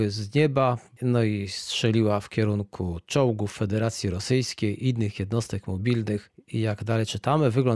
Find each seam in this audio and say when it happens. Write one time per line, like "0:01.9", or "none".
0:01.0